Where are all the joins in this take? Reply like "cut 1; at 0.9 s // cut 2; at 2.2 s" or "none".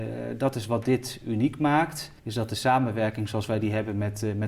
cut 1; at 2.2 s